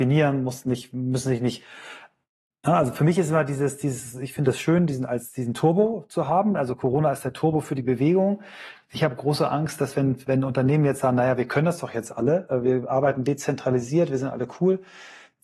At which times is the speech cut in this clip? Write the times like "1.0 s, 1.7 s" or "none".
none

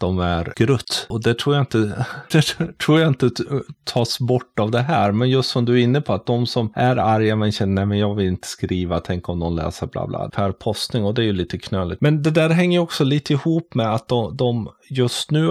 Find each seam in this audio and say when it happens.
10.3 s, 12.0 s

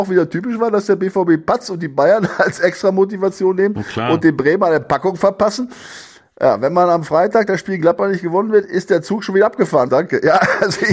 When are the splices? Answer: 9.9 s

